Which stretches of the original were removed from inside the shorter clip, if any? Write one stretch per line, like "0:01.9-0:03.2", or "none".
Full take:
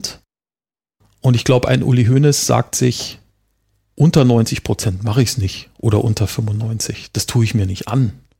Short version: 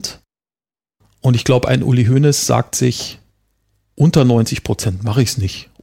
none